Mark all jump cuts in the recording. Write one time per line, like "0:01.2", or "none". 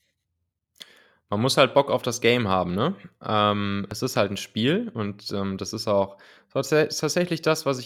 none